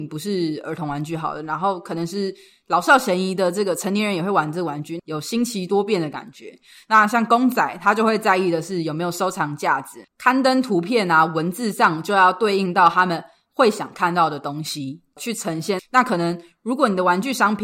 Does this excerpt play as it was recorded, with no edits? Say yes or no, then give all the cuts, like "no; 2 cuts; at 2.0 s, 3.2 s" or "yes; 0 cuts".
no; 3 cuts; at 5.0 s, 10.0 s, 15.8 s